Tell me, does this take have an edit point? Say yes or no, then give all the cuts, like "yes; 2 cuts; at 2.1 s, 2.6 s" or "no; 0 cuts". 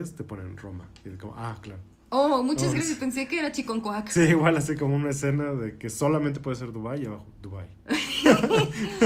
no; 0 cuts